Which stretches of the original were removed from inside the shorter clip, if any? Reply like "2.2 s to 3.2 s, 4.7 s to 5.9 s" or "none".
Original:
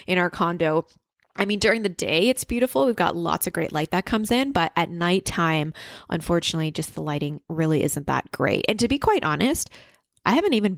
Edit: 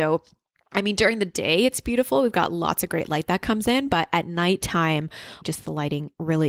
6.0 s to 6.7 s